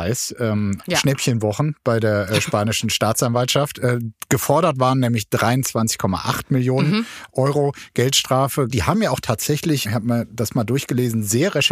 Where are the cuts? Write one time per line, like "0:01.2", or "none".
0:08.7
0:09.8